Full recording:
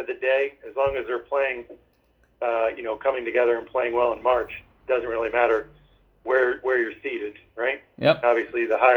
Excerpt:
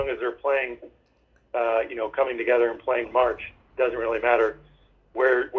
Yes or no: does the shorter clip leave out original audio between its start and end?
yes